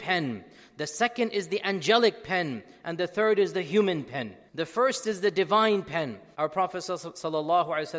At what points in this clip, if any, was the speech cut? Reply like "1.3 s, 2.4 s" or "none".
4.5 s, 6.3 s